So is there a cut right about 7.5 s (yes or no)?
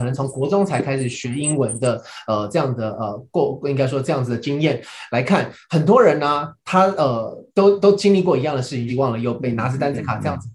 yes